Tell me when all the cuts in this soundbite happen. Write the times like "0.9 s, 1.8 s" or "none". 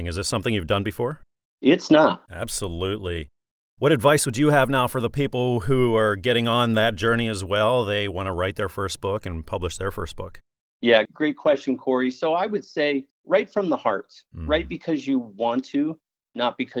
2.3 s, 11.1 s